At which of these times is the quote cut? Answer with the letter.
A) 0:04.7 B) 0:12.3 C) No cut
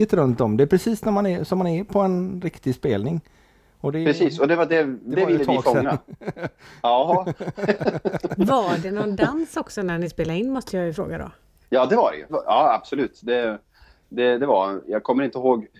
B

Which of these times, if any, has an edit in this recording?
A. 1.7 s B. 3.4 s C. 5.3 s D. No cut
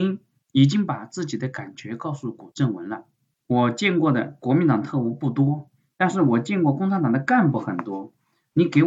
B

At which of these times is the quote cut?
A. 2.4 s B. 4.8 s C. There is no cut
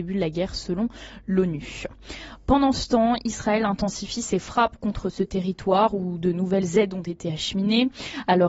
C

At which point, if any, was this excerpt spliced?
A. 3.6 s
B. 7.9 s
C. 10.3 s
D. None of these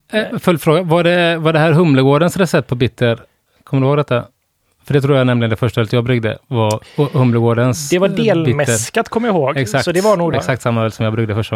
C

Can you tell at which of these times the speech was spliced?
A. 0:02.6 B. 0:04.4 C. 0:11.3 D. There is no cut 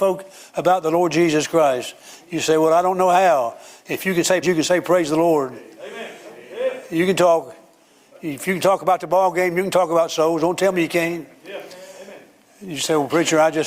B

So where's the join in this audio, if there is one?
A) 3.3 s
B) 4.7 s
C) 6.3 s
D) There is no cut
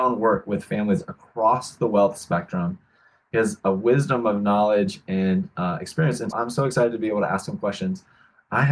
C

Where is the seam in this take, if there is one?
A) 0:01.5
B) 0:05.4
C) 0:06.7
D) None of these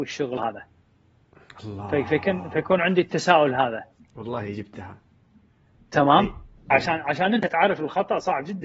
C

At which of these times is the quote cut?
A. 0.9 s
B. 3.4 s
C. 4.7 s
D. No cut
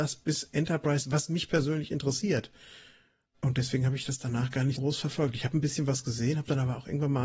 C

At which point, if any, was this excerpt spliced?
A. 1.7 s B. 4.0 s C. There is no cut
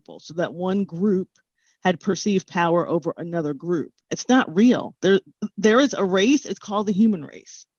B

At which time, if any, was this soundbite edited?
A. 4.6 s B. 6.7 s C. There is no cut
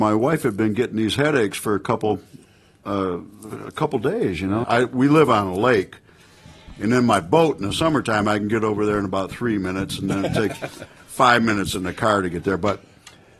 A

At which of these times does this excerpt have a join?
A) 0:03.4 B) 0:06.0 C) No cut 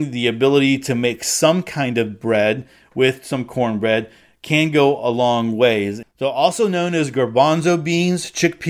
B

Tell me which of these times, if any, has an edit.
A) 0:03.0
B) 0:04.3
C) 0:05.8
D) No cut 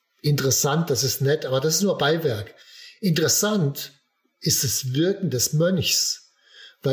D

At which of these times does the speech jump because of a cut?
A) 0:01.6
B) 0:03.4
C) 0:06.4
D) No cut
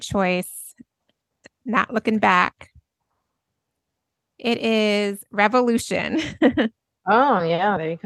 D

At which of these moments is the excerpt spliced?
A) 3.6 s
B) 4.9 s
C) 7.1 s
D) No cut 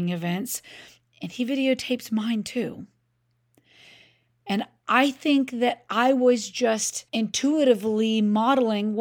C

